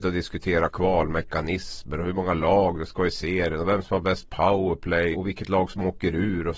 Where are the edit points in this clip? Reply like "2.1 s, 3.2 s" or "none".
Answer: 5.1 s